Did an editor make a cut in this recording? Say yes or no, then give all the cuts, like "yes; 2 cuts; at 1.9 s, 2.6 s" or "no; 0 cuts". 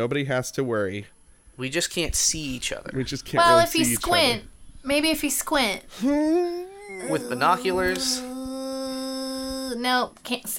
no; 0 cuts